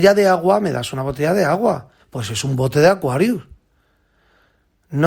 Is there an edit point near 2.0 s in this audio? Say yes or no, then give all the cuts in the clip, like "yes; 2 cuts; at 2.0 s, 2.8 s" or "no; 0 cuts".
yes; 1 cut; at 2.0 s